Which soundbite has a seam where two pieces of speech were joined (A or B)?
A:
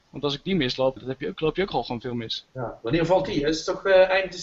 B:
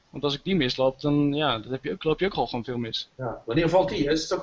A